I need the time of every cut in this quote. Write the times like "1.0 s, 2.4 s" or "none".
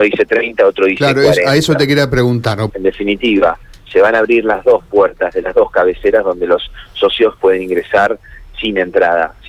2.7 s